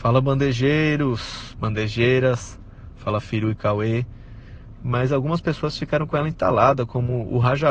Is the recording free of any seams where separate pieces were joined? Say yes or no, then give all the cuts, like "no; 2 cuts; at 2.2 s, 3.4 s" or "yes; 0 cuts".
no; 1 cut; at 4.8 s